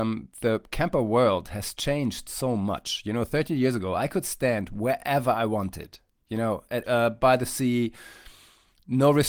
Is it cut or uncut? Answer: cut